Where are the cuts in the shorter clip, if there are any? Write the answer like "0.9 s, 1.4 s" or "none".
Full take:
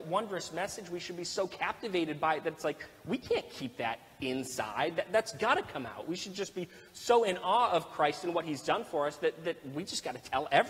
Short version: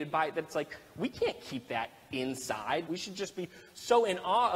2.9 s